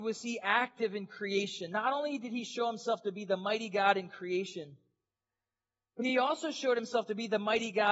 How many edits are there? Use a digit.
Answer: 0